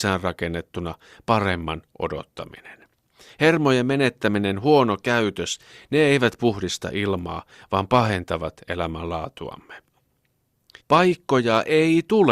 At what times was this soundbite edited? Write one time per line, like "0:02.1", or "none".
0:10.8